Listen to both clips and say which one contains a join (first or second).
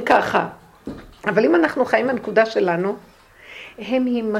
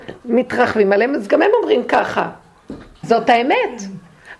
second